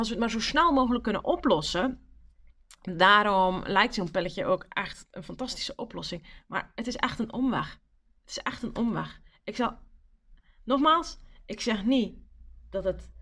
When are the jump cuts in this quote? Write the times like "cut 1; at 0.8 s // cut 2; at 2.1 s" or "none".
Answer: none